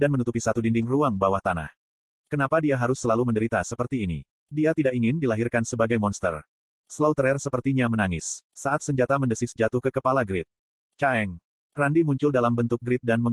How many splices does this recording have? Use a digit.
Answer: 1